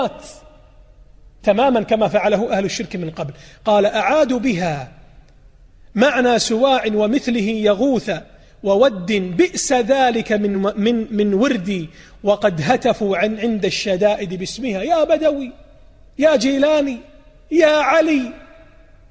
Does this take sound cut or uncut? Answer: uncut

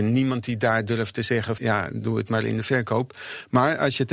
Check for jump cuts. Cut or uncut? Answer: cut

